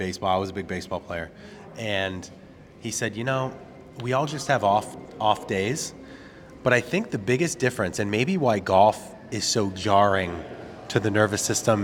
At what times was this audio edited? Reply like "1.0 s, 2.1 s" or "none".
none